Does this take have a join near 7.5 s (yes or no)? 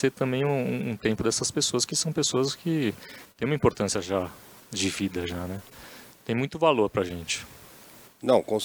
no